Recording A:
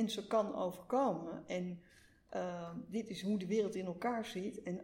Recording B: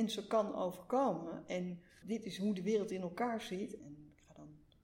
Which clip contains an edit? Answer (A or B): B